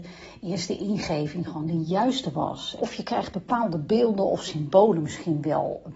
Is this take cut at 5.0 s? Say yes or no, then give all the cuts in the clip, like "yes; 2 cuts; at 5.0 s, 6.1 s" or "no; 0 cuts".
no; 1 cut; at 2.8 s